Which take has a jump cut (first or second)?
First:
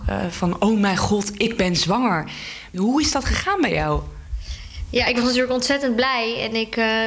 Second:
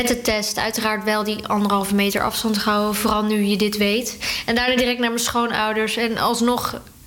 first